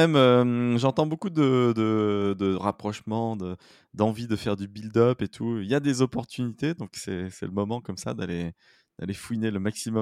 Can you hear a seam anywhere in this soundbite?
no; 0 cuts

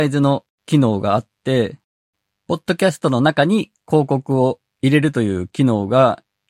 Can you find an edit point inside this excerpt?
no; 0 cuts

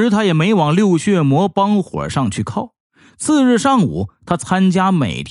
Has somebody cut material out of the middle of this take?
no; 0 cuts

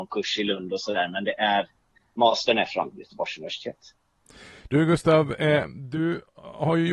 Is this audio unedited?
yes; 0 cuts

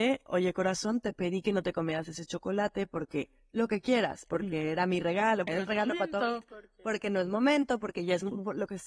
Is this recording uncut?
no; 1 cut; at 5.5 s

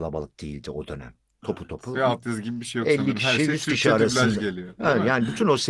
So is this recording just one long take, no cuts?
yes; 0 cuts

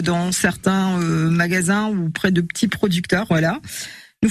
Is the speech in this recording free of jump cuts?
no; 1 cut; at 3.3 s

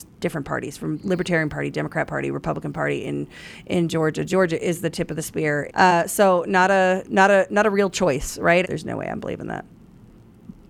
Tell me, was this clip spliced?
yes; 2 cuts; at 5.7 s, 8.6 s

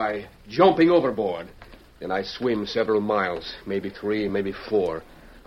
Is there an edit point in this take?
no; 0 cuts

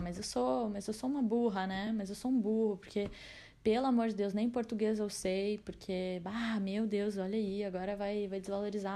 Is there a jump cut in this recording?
no; 0 cuts

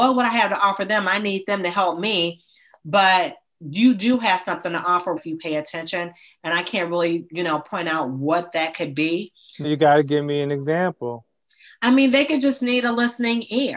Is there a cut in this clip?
yes; 2 cuts; at 5.2 s, 9.6 s

